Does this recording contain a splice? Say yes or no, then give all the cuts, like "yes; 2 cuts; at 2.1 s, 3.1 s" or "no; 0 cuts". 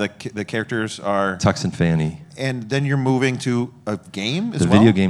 no; 0 cuts